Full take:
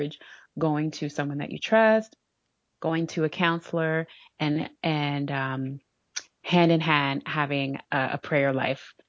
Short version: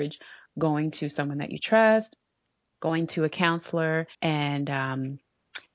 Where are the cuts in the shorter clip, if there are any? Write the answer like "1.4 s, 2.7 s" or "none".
4.1 s